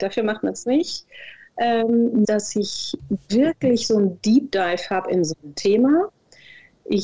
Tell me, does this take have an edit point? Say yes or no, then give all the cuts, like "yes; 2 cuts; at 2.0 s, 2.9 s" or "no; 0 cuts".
yes; 1 cut; at 2.2 s